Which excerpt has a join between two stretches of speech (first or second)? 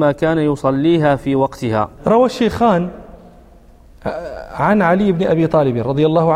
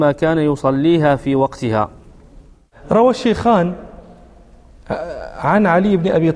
first